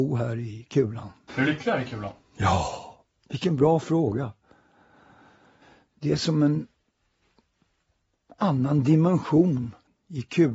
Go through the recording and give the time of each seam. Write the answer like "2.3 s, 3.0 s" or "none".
1.3 s